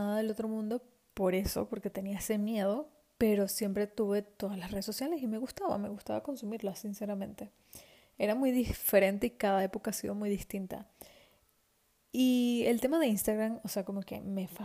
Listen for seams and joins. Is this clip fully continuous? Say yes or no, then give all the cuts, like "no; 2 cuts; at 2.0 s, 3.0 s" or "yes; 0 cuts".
yes; 0 cuts